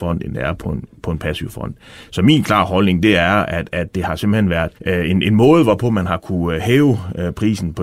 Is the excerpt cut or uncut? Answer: cut